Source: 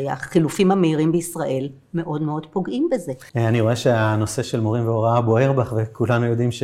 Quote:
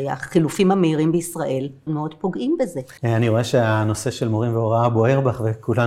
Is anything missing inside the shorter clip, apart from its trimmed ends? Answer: yes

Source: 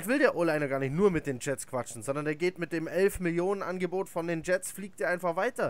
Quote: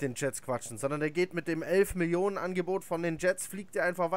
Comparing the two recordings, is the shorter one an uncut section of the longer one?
yes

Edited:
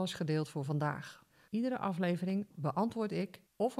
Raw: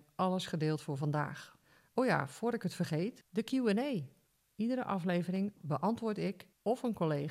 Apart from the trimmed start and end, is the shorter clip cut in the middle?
yes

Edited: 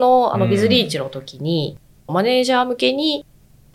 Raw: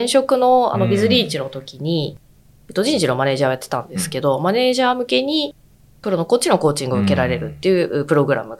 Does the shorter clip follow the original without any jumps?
no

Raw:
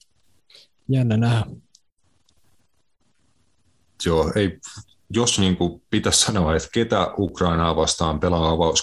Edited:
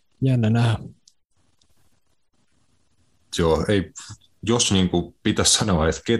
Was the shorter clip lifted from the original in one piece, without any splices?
yes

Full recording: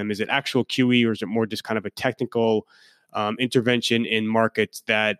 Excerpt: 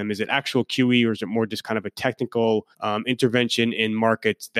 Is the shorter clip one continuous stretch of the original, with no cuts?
no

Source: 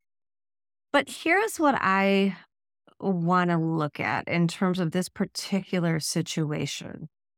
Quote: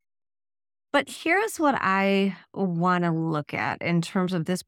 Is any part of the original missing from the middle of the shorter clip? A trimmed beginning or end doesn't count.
yes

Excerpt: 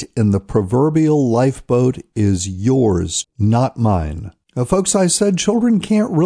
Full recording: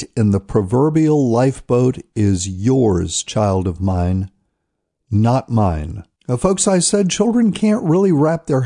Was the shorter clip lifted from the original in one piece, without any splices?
no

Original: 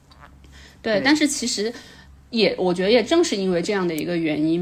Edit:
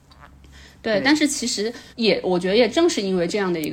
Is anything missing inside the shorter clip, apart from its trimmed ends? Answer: yes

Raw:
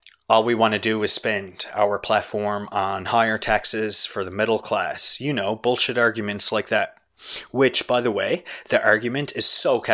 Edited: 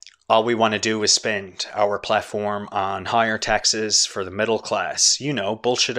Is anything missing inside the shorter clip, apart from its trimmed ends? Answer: no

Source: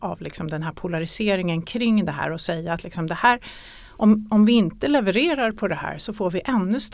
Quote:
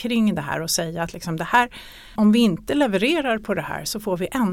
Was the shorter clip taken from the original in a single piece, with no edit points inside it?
no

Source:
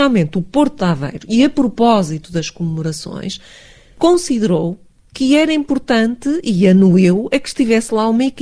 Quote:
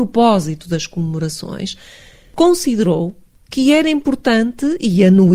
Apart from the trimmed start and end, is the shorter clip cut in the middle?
no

